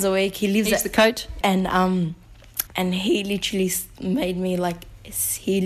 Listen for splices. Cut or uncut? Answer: cut